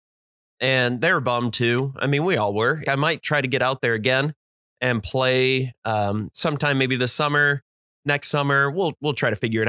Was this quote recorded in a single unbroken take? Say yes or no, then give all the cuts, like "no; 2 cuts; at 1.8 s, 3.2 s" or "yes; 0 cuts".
no; 1 cut; at 2.8 s